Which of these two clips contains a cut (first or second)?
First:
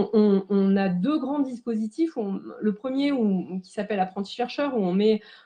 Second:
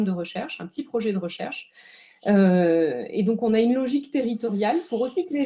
second